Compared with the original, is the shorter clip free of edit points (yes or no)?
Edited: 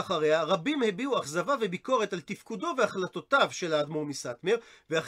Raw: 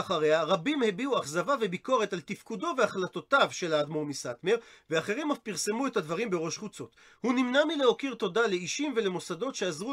yes